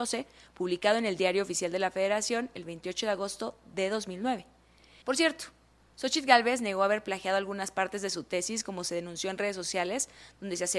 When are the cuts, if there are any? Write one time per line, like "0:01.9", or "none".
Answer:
0:05.0